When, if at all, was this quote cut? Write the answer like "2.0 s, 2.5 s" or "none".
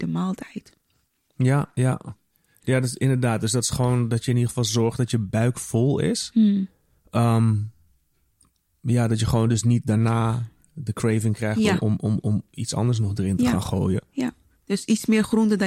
none